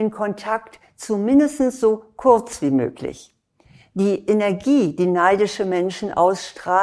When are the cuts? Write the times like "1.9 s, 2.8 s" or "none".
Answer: none